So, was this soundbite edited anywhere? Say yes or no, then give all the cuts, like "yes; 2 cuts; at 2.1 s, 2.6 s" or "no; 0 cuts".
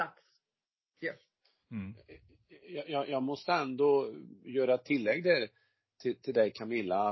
no; 0 cuts